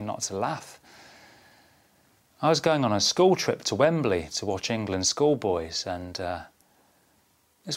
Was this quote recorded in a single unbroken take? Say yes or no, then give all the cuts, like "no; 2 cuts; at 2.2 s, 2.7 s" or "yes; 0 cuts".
no; 1 cut; at 2.3 s